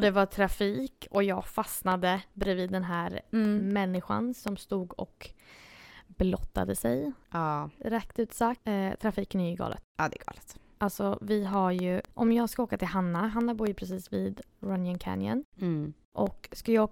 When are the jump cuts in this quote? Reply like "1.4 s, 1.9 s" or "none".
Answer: none